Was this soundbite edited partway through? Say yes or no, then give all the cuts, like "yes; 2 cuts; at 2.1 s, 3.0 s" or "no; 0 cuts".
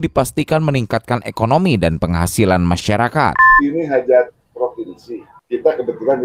no; 0 cuts